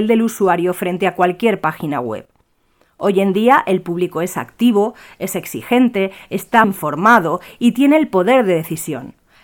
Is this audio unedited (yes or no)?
no